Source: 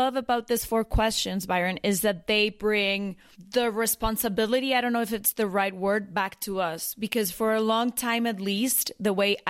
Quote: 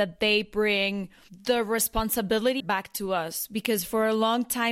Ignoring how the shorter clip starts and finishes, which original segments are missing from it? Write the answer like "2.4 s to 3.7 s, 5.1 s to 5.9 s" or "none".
4.7 s to 6.1 s